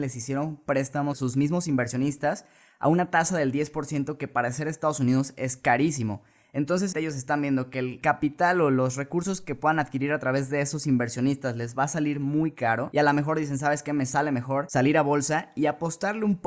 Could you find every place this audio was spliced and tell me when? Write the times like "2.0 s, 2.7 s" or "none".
6.9 s